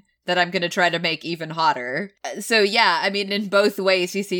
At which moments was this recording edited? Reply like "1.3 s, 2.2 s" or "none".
none